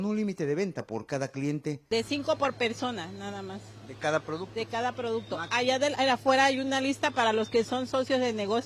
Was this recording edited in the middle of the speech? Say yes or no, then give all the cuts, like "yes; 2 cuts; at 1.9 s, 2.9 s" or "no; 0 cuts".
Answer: no; 0 cuts